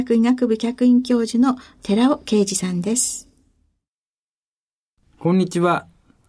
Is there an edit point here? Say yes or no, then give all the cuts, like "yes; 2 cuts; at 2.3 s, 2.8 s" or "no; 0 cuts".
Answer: no; 0 cuts